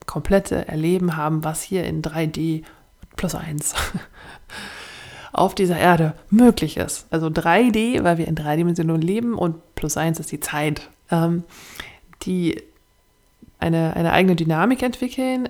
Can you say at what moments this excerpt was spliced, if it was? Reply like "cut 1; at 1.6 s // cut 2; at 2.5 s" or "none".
cut 1; at 7.1 s // cut 2; at 11.0 s // cut 3; at 13.6 s